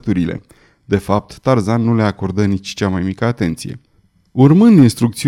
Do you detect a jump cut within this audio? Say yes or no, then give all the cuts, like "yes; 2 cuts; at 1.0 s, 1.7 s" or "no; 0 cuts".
no; 0 cuts